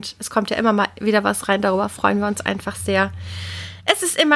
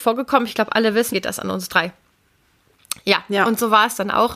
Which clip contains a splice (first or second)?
second